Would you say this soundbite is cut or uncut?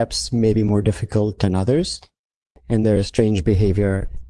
uncut